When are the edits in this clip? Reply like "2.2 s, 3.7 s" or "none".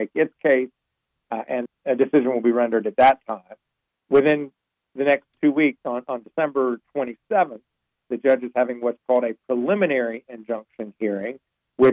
1.7 s, 3.9 s